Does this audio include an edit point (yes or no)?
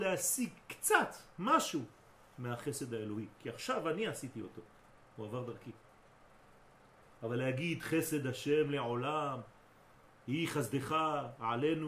no